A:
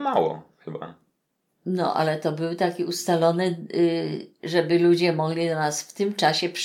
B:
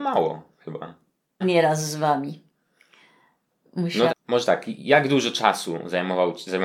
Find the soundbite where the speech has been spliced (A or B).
B